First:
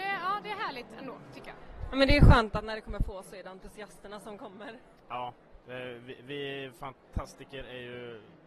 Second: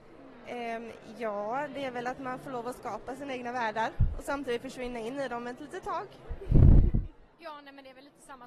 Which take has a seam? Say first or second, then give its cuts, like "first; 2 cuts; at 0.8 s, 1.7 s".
second; 1 cut; at 7.3 s